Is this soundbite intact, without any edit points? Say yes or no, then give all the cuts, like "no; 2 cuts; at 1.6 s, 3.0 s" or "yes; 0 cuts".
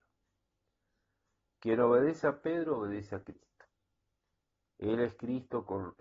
yes; 0 cuts